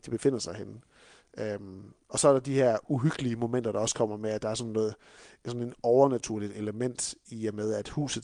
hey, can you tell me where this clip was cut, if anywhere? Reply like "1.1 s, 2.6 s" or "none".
none